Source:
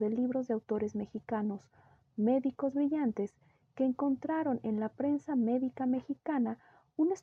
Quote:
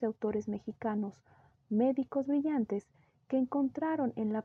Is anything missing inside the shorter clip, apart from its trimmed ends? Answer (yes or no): no